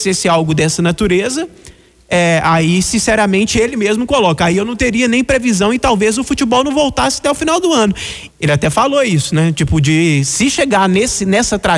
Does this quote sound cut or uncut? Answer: cut